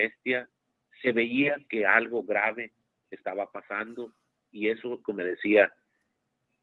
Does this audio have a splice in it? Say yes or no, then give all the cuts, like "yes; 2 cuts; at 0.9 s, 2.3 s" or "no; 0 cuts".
yes; 1 cut; at 5.0 s